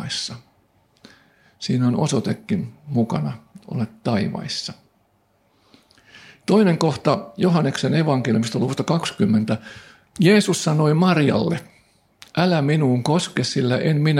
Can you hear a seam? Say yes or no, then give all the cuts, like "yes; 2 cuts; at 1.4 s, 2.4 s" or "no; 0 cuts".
no; 0 cuts